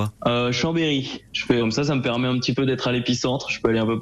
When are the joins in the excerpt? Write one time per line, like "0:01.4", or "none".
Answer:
0:01.6